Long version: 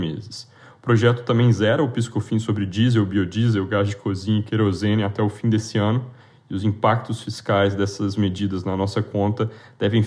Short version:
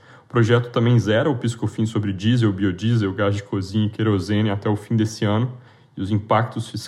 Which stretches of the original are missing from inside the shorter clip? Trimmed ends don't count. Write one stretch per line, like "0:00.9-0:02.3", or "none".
none

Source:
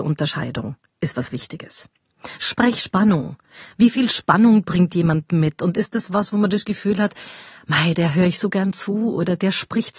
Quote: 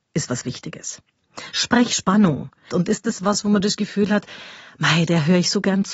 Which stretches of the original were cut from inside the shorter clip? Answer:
0:03.5-0:05.6

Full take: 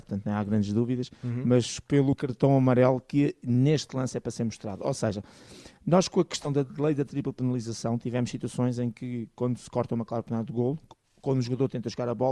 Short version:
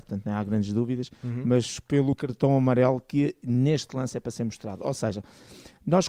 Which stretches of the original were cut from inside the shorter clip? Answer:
none

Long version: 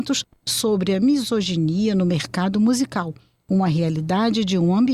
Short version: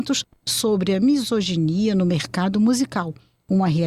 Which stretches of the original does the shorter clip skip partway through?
none

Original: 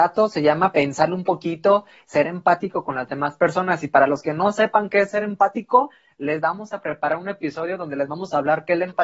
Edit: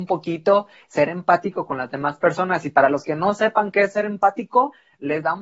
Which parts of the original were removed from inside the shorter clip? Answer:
none

